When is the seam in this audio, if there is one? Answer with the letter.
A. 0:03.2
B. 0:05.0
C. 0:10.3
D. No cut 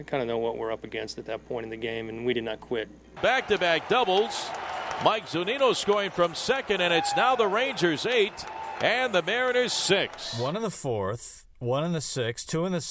A